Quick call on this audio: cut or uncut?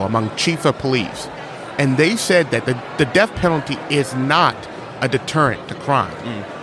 uncut